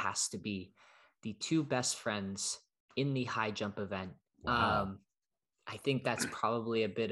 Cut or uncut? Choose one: cut